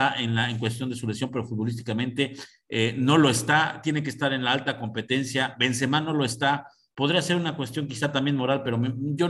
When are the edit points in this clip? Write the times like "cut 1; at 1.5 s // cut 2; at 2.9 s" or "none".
none